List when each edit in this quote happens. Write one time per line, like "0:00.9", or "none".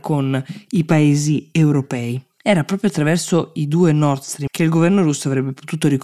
0:04.5

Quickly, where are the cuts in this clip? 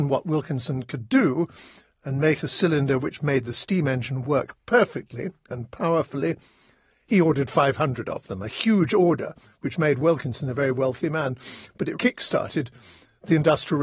0:11.9

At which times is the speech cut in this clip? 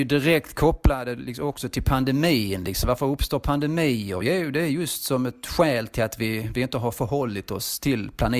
none

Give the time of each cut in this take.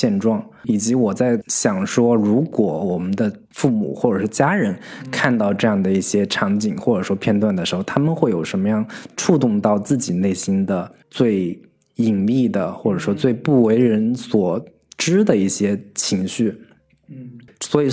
none

